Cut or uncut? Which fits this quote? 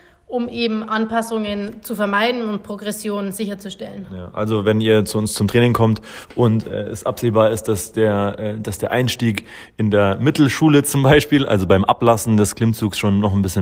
uncut